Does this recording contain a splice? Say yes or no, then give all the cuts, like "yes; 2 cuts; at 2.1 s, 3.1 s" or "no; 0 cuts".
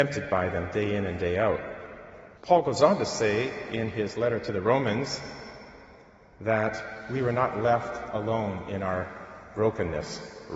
yes; 1 cut; at 2.4 s